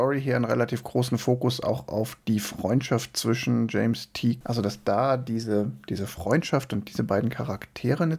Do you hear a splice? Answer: yes; 1 cut; at 4.4 s

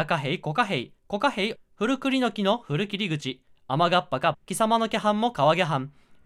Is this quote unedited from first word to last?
no; 2 cuts; at 1.6 s, 4.3 s

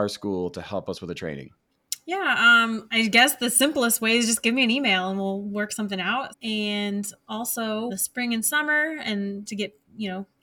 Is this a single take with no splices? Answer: no; 3 cuts; at 6.3 s, 7.9 s, 9.5 s

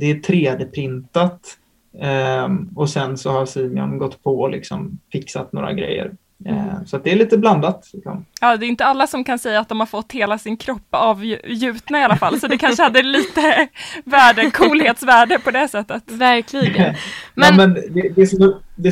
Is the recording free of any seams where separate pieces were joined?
yes; 0 cuts

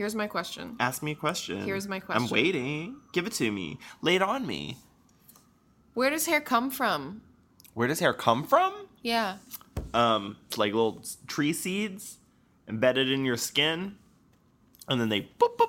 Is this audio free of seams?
no; 1 cut; at 10.5 s

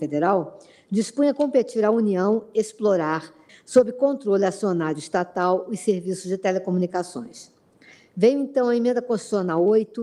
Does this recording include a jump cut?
yes; 1 cut; at 3.5 s

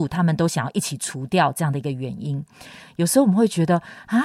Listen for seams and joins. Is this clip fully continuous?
no; 1 cut; at 2.8 s

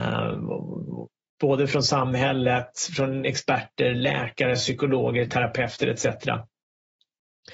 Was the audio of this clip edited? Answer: no; 0 cuts

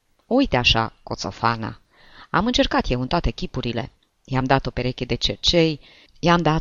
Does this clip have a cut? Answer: no; 0 cuts

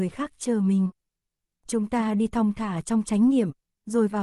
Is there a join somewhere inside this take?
no; 0 cuts

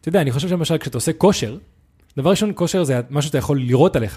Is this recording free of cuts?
yes; 0 cuts

